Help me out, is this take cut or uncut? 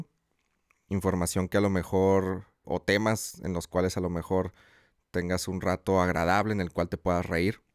cut